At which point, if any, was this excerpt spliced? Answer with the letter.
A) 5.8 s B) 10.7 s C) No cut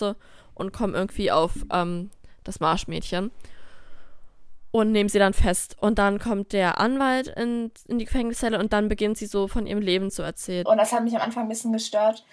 B